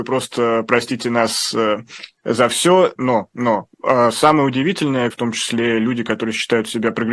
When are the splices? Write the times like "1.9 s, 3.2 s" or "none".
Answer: 3.0 s, 5.1 s